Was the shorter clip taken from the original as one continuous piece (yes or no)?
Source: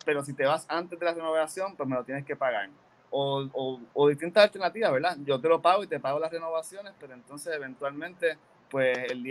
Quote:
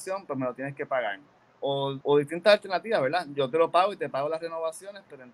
no